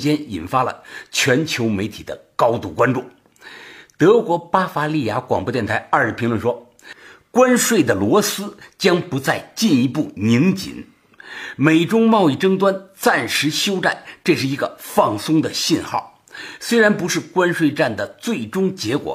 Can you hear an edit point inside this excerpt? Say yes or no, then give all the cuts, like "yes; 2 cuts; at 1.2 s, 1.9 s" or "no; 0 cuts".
no; 0 cuts